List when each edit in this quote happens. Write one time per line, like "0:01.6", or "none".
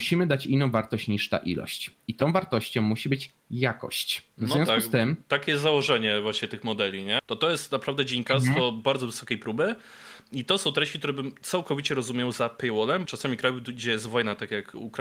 0:07.2
0:13.1

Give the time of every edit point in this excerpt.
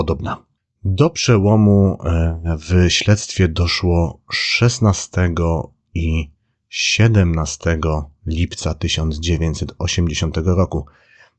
none

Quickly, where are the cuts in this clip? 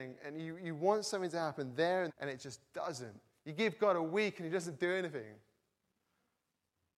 0:02.1

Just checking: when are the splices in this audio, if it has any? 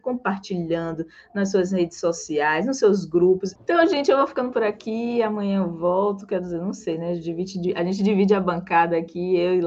0:03.6

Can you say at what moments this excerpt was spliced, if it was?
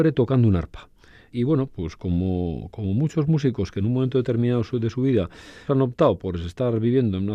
0:01.3
0:05.7

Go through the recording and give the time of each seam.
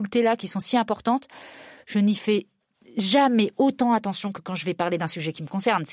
none

